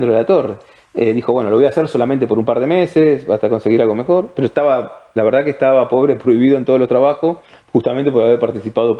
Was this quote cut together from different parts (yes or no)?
no